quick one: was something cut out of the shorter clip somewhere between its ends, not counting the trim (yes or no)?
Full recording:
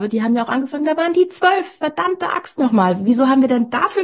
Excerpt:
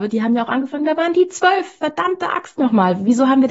no